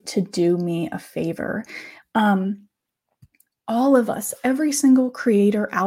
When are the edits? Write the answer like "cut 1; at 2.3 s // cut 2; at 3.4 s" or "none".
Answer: cut 1; at 2.0 s